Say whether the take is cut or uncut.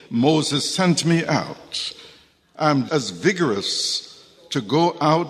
cut